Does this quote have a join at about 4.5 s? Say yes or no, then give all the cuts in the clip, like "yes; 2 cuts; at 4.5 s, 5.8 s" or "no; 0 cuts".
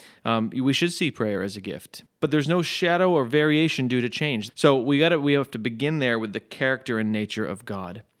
yes; 2 cuts; at 2.1 s, 4.5 s